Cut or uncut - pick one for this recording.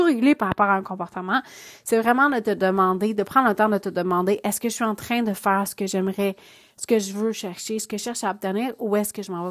uncut